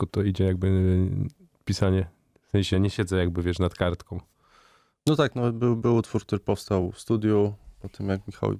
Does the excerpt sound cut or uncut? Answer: cut